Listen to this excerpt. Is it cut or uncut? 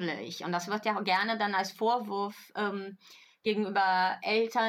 uncut